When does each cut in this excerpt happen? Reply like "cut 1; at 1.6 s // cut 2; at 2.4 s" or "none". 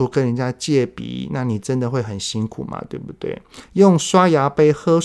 cut 1; at 3.7 s